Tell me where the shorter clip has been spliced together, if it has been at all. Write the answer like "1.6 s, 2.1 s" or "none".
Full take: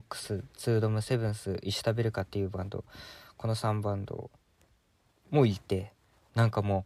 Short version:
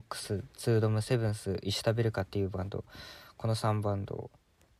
none